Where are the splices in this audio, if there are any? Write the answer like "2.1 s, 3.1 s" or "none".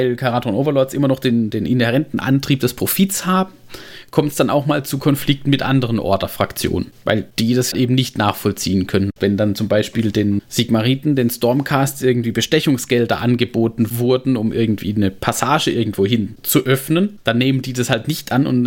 9.2 s